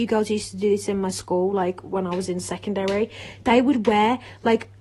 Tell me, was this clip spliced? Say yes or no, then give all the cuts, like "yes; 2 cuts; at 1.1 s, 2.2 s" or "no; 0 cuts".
no; 0 cuts